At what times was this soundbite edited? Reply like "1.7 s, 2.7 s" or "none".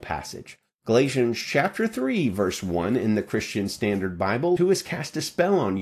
4.6 s

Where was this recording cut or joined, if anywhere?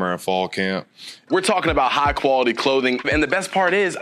1.3 s, 3.0 s

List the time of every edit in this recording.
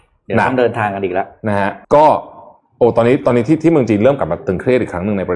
1.8 s

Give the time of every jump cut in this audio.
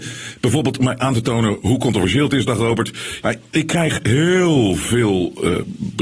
3.2 s

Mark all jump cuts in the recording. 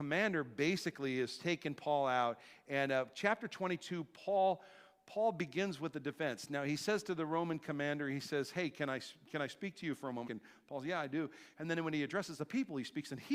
10.3 s, 11.5 s

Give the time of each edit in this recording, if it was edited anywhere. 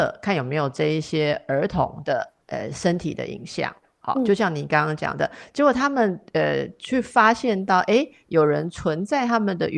2.4 s

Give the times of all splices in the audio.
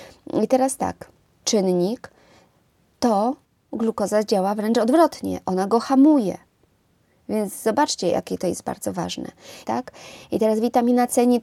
1.4 s, 9.6 s

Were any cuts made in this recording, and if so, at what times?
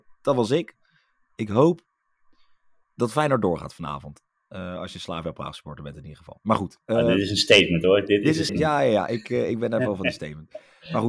8.5 s

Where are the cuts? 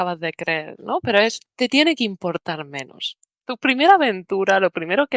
3.4 s

